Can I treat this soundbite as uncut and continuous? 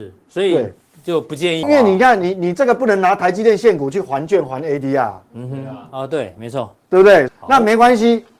no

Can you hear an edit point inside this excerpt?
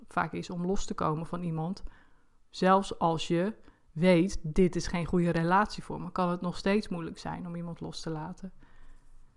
no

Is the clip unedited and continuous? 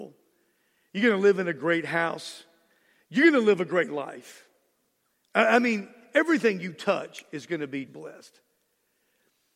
no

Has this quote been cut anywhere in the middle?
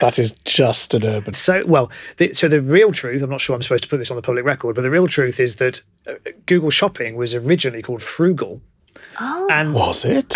yes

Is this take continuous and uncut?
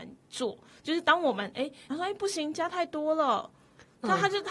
no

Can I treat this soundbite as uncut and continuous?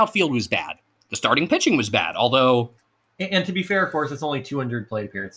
yes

